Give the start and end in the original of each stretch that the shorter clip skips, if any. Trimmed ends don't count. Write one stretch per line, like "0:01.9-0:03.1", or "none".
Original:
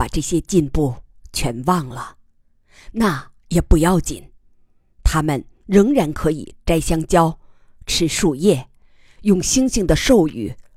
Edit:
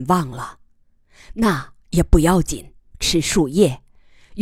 0:04.5-0:07.8